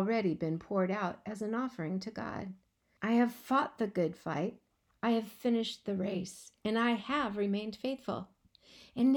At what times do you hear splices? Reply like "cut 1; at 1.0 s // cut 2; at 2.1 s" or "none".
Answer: cut 1; at 3.0 s

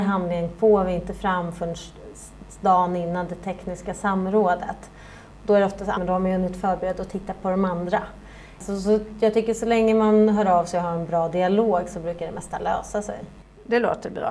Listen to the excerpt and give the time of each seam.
cut 1; at 5.9 s

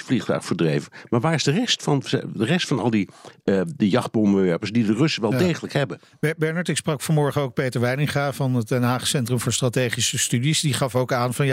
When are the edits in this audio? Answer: none

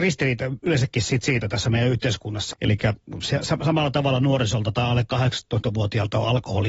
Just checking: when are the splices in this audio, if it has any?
cut 1; at 2.5 s

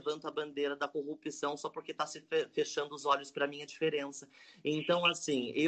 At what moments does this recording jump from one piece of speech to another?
none

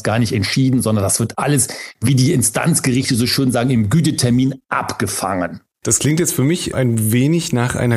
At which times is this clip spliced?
none

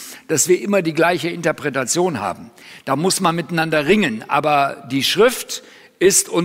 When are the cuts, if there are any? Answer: none

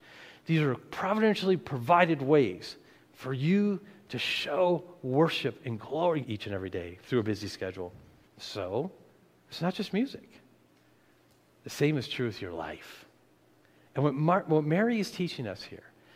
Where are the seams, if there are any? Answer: cut 1; at 6.2 s // cut 2; at 8.2 s // cut 3; at 13.9 s

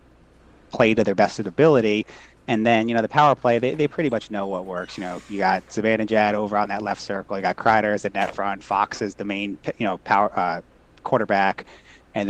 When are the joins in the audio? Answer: none

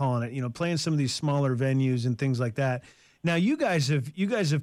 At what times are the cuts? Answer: none

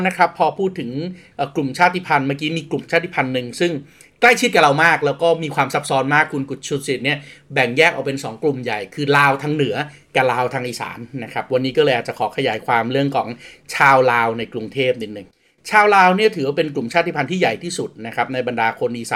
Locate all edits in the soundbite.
none

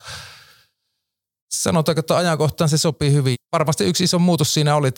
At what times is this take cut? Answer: cut 1; at 3.3 s

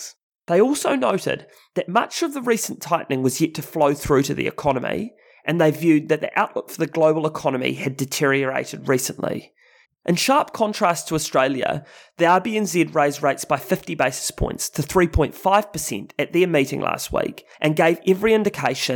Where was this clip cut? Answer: cut 1; at 9.8 s // cut 2; at 17.5 s

